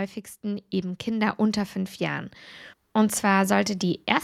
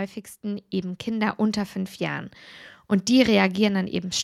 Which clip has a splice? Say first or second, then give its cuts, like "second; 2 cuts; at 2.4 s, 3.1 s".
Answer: first; 1 cut; at 2.7 s